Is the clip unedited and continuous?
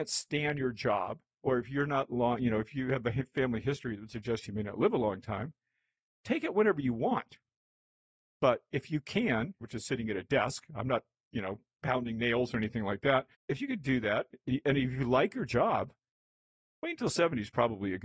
no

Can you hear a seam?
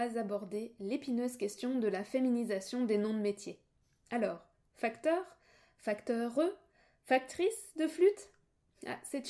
no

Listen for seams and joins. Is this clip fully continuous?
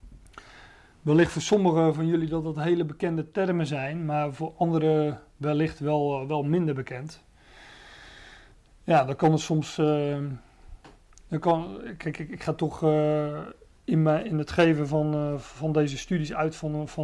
yes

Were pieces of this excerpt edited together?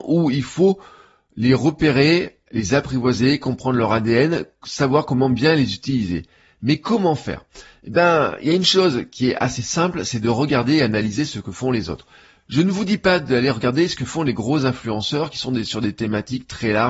no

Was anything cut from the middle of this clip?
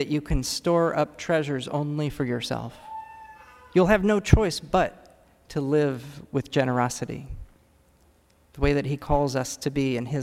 yes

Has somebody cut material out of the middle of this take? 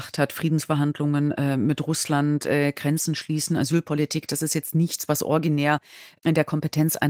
no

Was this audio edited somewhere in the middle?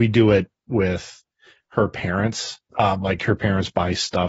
yes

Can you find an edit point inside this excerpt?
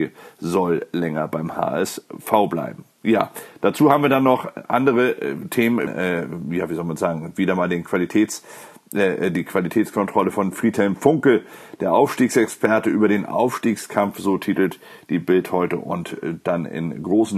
yes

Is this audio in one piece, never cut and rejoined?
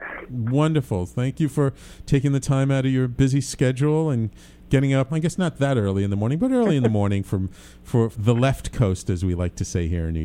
no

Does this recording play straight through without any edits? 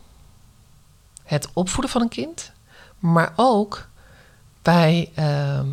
yes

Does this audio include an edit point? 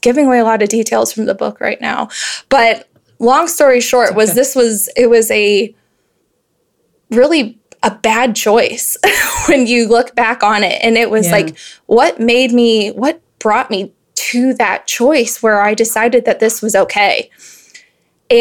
no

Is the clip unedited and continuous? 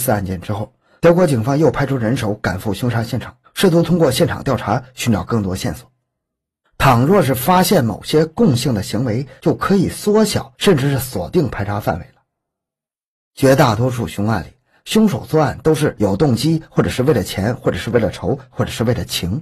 yes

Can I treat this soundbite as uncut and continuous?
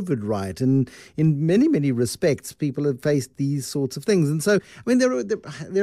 yes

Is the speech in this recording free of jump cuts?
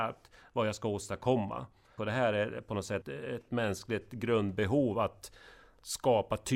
no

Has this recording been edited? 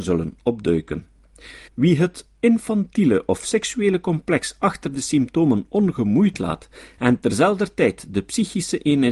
yes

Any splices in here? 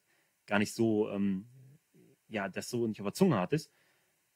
no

